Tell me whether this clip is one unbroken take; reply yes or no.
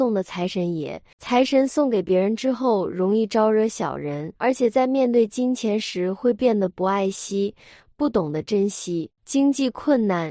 no